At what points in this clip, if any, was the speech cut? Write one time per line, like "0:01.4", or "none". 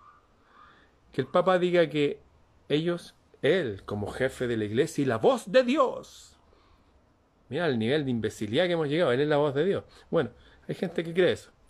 none